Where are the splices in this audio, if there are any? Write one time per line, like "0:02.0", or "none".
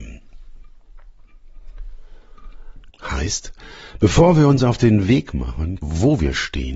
0:02.9
0:05.8

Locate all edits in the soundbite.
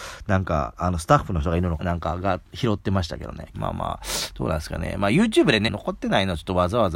0:01.8
0:03.5
0:05.7

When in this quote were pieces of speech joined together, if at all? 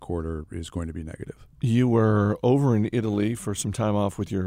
0:01.5

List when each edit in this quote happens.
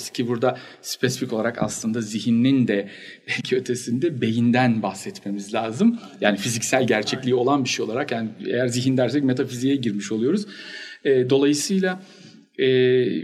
none

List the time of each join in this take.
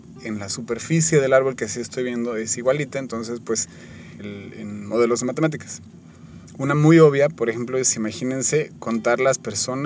0:04.2

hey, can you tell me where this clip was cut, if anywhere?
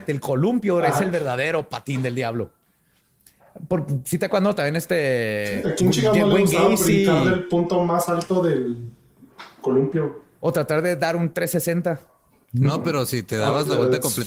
none

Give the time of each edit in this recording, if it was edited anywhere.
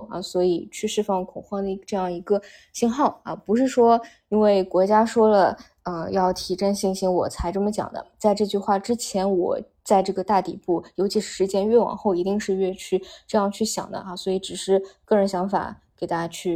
none

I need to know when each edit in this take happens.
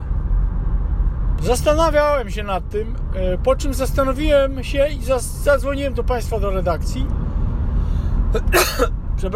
0:01.4

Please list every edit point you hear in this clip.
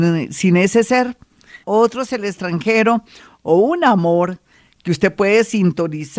0:01.6

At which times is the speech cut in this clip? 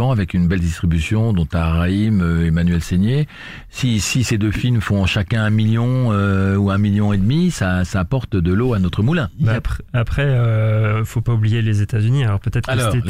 none

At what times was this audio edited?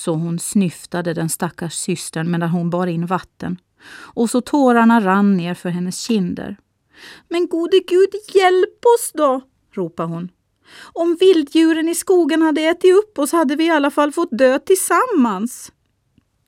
none

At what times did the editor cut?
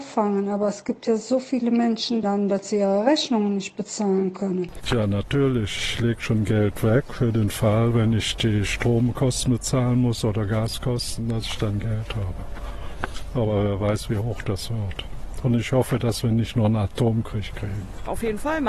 0:02.2

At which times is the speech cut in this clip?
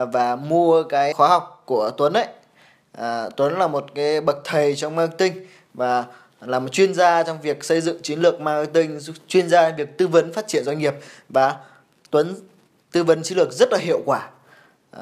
0:01.1

